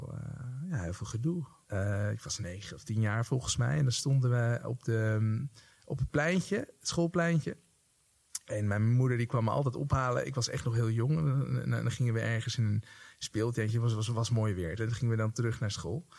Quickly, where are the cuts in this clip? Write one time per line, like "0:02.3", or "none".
0:01.6
0:14.8